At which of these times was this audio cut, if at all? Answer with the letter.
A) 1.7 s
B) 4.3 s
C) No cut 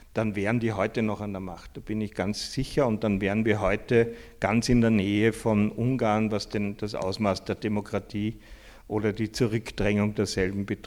C